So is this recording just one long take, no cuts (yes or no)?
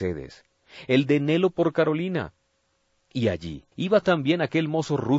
no